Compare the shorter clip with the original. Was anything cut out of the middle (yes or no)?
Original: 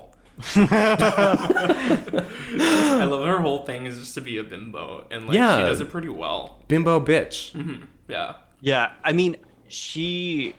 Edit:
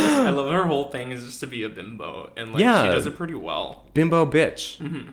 no